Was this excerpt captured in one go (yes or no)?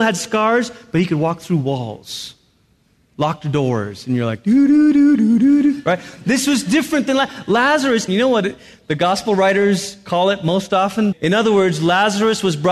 no